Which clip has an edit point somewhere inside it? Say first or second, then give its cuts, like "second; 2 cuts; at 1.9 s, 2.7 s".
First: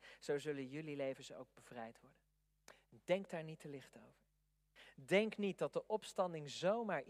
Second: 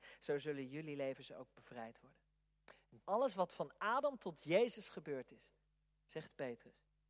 second; 1 cut; at 3.0 s